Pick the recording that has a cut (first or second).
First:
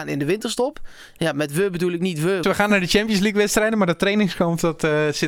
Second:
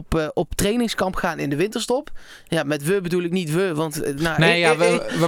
first